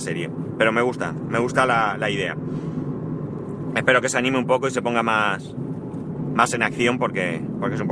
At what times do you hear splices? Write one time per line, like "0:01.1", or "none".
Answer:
none